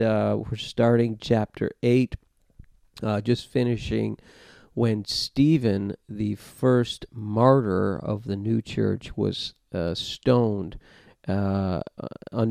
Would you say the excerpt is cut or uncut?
uncut